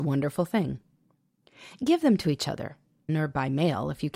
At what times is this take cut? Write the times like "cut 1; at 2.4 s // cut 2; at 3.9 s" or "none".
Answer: cut 1; at 3.1 s